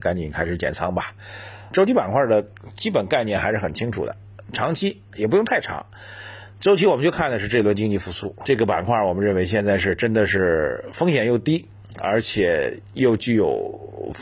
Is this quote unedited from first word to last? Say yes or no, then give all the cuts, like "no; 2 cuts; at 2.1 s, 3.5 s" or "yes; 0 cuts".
no; 2 cuts; at 1.7 s, 8.4 s